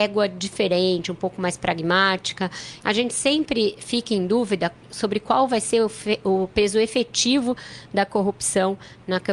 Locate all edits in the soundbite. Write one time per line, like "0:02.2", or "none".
0:02.8